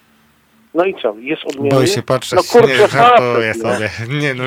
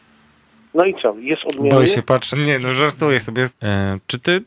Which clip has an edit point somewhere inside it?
second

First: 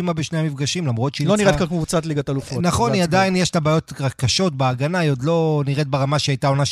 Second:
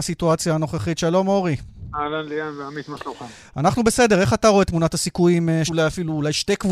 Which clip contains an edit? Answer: second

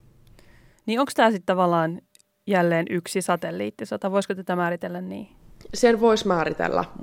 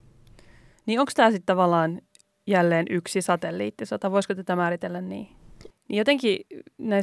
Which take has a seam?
second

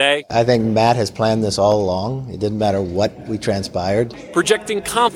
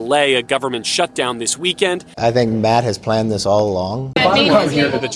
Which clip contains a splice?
second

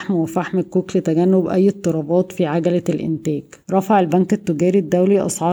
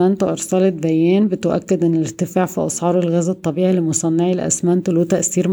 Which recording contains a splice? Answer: first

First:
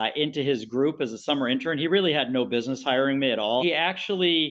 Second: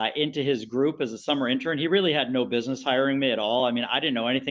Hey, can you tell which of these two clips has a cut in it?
first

